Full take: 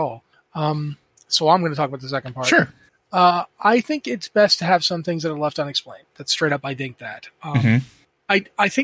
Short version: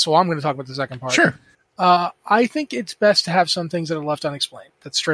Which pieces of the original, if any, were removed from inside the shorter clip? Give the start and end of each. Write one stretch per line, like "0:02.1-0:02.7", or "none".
none